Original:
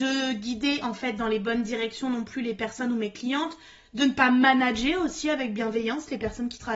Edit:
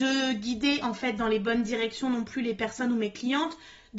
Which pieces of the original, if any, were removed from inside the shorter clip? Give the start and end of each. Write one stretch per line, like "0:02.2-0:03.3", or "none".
none